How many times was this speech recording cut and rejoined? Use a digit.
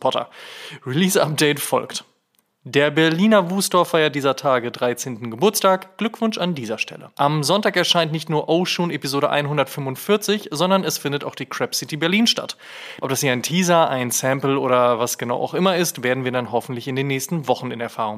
2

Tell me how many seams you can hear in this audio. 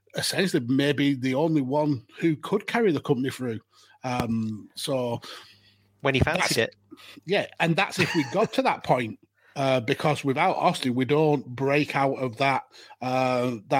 0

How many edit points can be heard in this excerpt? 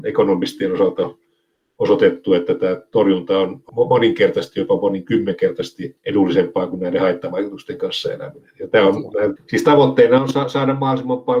1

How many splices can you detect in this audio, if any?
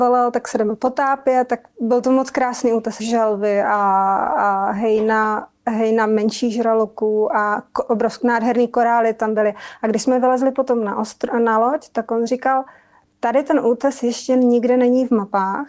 1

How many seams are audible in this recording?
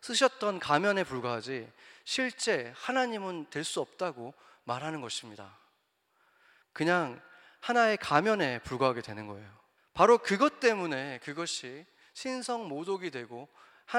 2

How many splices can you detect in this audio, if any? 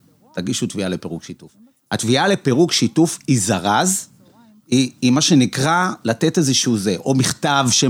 0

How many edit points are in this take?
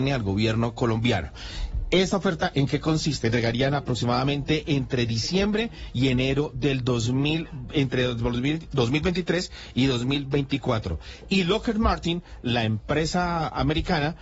1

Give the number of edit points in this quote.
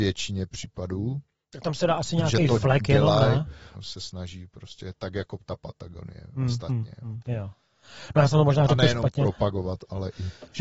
2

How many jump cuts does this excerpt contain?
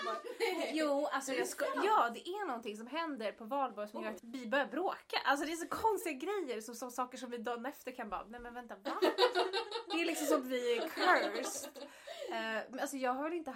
1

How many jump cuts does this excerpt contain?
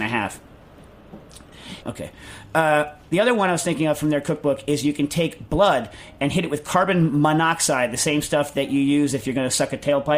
1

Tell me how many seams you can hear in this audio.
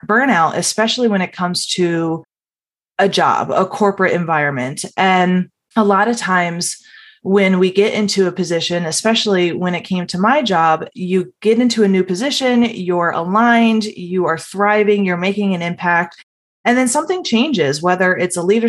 0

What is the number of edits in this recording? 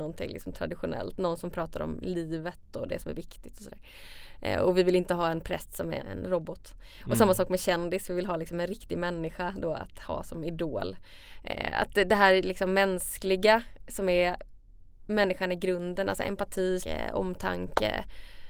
2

